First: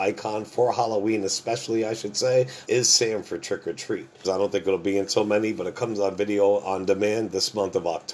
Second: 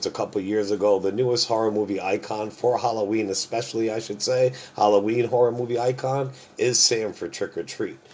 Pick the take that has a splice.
first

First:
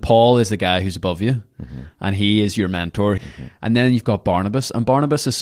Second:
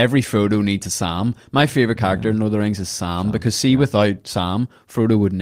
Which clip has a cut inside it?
first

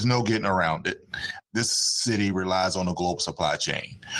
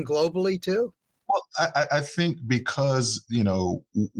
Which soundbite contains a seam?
first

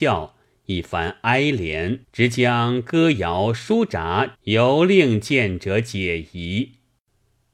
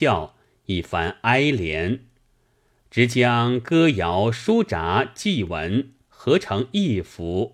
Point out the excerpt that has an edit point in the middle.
first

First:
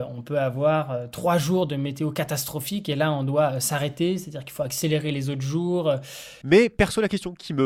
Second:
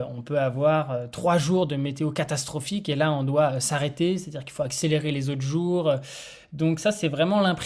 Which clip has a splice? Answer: first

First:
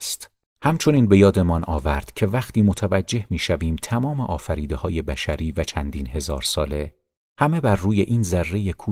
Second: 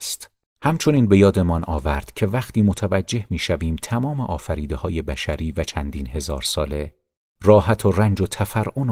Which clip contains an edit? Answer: first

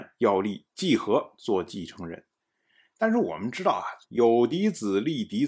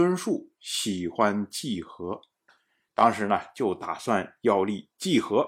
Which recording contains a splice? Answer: first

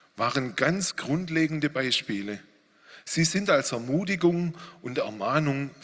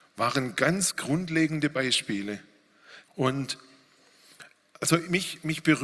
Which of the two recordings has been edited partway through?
second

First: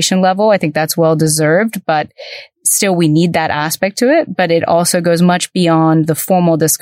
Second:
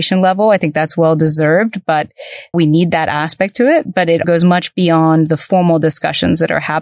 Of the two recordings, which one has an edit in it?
second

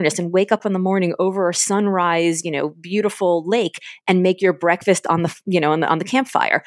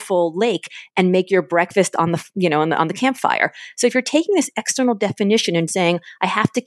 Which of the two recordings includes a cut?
second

